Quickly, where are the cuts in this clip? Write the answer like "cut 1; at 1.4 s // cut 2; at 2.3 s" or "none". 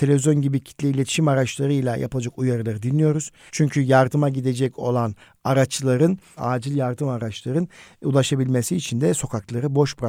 cut 1; at 3.5 s // cut 2; at 6.4 s